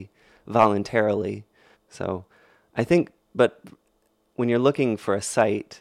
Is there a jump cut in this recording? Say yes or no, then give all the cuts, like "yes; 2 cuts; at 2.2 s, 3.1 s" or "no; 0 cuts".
yes; 1 cut; at 1.7 s